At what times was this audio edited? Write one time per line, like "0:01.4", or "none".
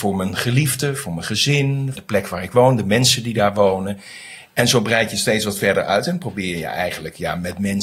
0:02.0